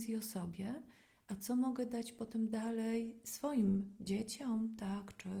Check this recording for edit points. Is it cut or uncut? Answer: uncut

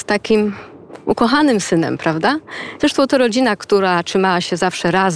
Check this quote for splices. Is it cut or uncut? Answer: cut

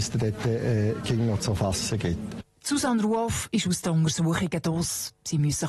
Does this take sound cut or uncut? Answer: uncut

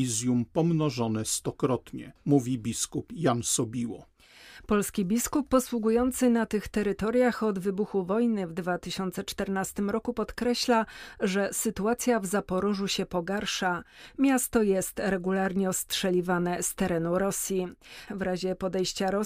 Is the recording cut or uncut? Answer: cut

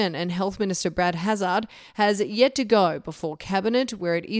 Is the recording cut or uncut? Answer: uncut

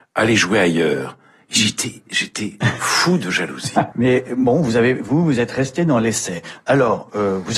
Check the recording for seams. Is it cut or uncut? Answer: cut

